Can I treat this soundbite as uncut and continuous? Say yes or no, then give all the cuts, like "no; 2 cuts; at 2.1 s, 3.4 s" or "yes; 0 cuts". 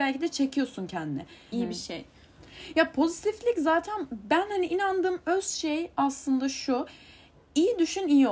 no; 1 cut; at 1.5 s